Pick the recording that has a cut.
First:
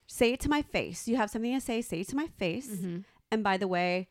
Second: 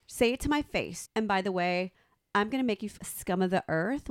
second; 2 cuts; at 1.0 s, 3.0 s

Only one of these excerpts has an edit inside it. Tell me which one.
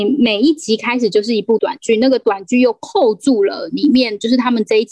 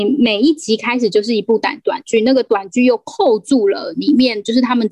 first; 1 cut; at 1.6 s

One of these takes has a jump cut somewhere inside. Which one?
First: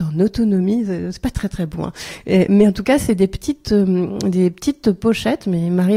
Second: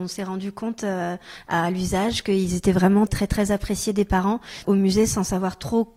second; 2 cuts; at 3.1 s, 4.6 s

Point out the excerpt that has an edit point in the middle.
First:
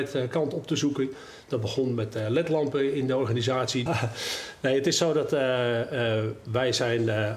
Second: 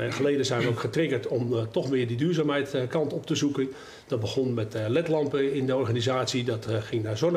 first; 1 cut; at 3.9 s

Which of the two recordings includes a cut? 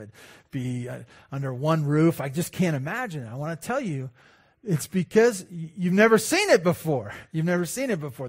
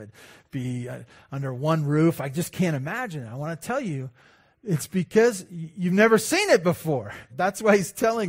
second; 1 cut; at 7.3 s

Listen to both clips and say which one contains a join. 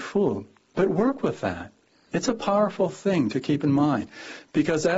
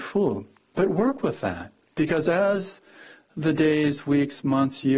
second; 1 cut; at 1.9 s

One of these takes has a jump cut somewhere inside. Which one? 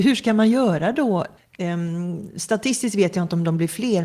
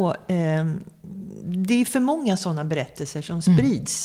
first; 1 cut; at 1.4 s

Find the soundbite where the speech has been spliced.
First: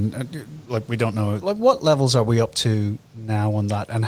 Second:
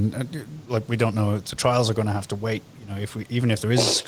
first; 1 cut; at 1.4 s

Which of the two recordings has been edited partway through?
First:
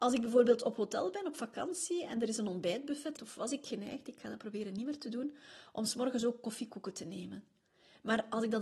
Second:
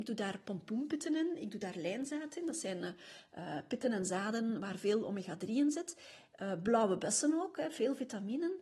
first; 1 cut; at 3.2 s

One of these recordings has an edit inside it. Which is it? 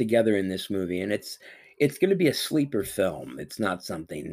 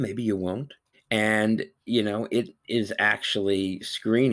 second; 1 cut; at 0.9 s

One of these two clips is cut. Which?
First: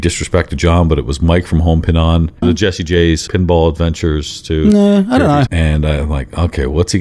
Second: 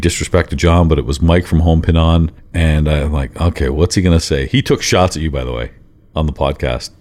first; 2 cuts; at 2.4 s, 5.5 s

